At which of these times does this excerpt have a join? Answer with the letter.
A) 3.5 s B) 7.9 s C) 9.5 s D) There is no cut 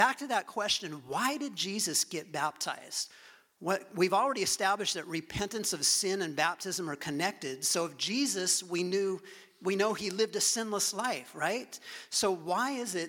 D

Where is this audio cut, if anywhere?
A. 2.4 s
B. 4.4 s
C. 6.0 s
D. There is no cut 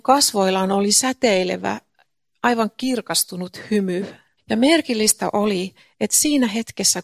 B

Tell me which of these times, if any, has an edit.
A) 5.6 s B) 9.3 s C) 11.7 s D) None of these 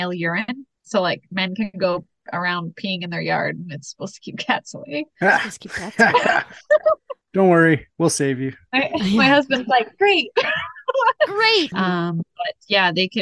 C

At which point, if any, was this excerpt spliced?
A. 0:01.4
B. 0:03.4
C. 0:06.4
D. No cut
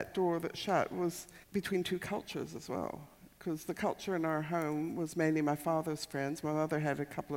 A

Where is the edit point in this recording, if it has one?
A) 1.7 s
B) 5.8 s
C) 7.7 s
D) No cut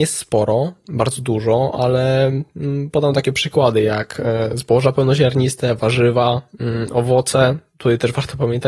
D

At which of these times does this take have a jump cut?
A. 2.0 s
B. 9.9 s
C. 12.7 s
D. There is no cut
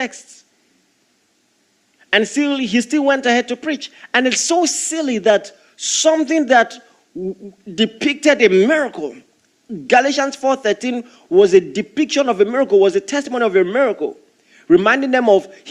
A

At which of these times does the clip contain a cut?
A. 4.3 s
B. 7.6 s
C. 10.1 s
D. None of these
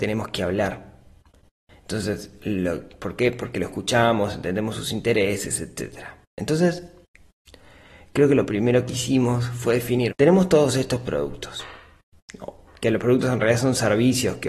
C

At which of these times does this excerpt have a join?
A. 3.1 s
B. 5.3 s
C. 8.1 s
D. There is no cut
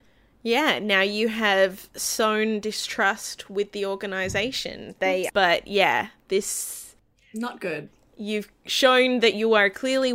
B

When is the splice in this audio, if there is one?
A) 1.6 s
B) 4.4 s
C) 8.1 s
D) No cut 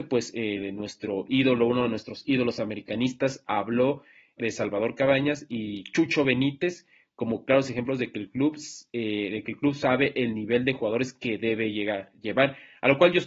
B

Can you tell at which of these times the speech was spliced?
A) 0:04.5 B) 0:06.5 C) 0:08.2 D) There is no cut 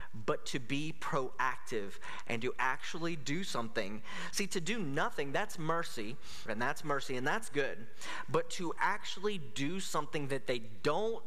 B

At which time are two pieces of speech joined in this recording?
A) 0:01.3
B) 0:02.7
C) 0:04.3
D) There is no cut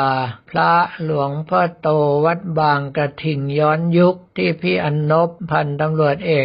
C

